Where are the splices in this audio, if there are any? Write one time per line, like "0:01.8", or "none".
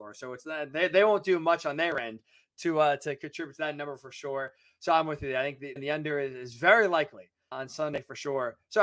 0:05.8
0:07.5